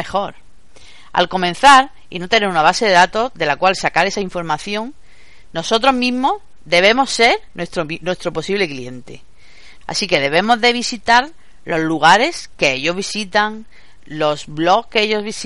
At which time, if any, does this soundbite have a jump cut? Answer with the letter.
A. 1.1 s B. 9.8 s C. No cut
B